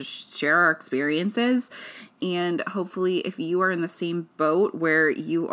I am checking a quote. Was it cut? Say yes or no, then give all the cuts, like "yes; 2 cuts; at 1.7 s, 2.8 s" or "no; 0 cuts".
yes; 1 cut; at 2.2 s